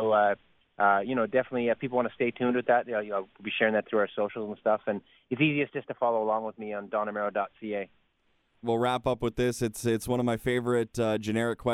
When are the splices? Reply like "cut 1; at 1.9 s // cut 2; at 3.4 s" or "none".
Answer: cut 1; at 8.6 s